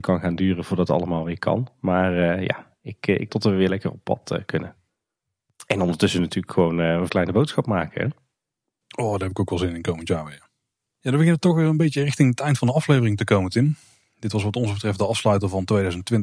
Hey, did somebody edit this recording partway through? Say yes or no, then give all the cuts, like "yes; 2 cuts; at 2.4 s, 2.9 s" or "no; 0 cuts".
yes; 2 cuts; at 3.3 s, 7.1 s